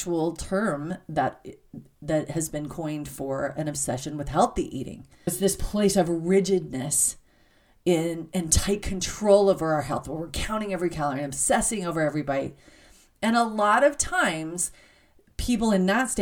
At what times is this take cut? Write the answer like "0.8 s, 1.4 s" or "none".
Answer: 5.3 s